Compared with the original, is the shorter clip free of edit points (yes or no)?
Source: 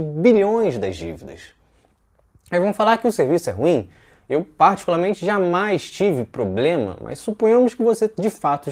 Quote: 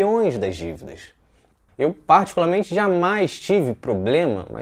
no